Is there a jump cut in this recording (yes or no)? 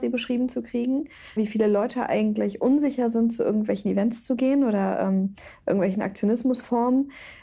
yes